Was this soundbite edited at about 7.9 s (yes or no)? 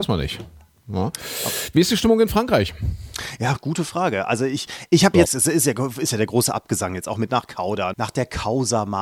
yes